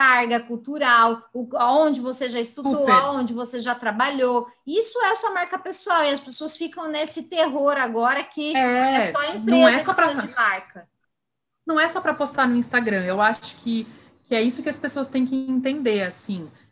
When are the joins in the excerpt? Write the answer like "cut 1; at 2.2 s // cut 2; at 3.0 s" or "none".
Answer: none